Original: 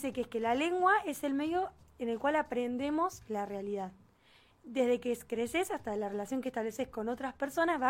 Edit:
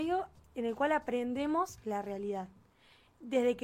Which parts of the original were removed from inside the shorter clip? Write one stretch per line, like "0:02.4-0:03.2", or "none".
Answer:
none